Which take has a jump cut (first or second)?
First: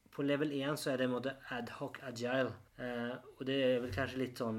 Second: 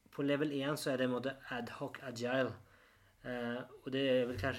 first